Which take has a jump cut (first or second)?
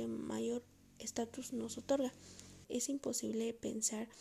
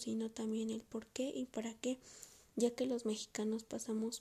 first